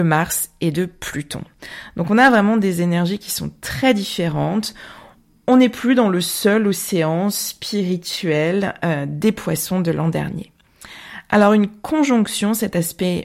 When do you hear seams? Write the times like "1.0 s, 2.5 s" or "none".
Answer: none

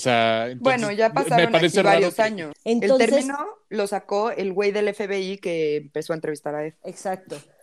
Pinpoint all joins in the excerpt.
2.5 s

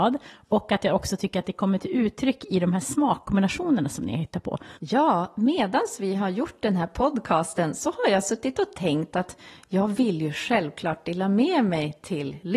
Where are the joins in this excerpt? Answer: 4.8 s

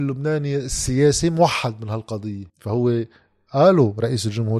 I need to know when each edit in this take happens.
2.5 s

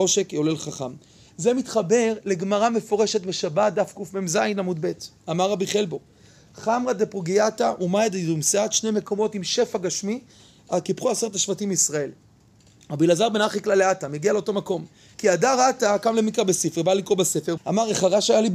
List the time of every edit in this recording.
15.1 s, 17.6 s

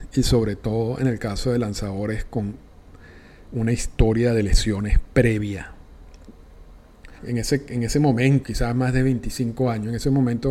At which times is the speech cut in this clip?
7.2 s, 8.4 s

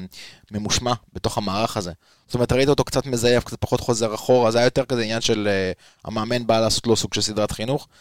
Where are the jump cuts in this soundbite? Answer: none

